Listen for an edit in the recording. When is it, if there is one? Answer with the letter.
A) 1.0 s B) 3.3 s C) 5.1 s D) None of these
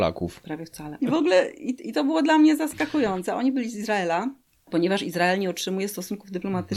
A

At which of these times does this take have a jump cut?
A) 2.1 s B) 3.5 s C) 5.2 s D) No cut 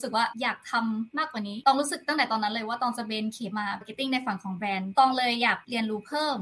B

